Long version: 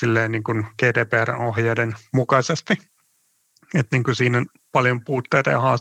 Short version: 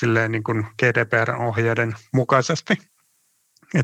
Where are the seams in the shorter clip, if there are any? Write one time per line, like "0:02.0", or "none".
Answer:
none